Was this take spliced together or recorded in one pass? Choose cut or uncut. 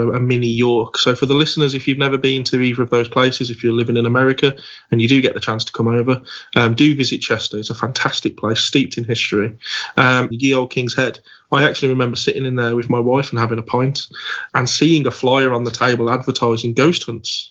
cut